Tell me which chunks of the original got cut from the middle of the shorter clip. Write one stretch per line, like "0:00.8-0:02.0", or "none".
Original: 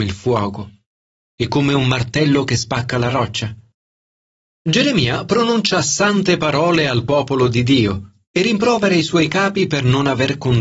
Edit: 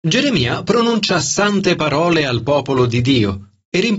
none